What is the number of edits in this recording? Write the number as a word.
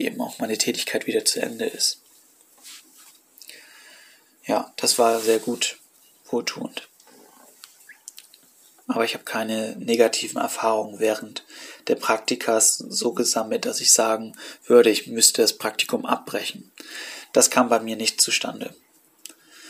zero